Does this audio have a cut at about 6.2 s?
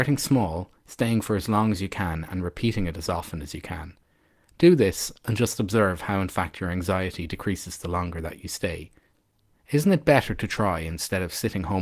no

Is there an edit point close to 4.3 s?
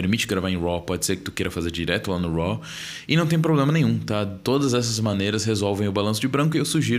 no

